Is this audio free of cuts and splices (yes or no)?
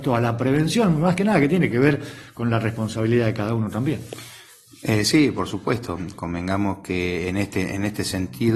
yes